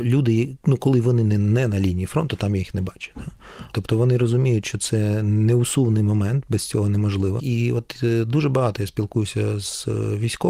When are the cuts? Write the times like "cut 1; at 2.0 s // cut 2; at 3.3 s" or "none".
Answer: cut 1; at 3.7 s // cut 2; at 7.4 s

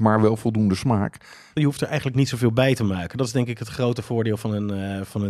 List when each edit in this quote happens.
cut 1; at 1.6 s

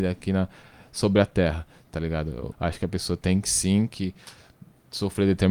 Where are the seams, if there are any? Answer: cut 1; at 2.5 s

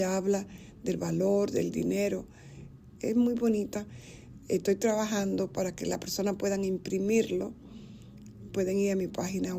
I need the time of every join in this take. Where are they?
cut 1; at 3.0 s

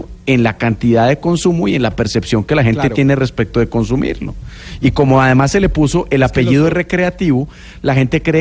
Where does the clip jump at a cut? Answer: none

